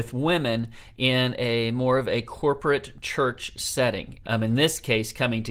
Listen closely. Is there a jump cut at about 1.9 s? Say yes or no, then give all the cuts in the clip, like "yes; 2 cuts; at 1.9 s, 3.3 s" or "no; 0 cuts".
no; 1 cut; at 4.2 s